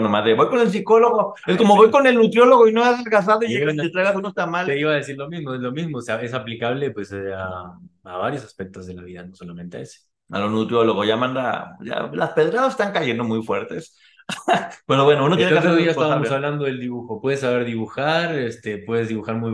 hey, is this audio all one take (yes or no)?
yes